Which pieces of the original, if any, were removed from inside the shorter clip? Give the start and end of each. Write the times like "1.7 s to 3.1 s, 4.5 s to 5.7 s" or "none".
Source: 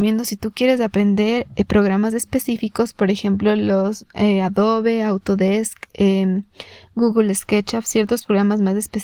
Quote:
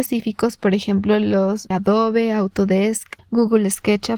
4.1 s to 4.4 s, 5.9 s to 6.8 s